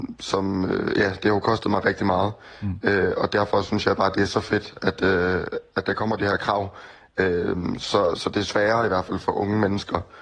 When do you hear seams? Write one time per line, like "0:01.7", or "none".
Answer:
0:08.2